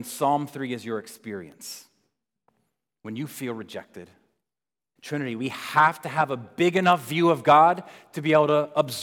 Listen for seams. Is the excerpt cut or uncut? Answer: cut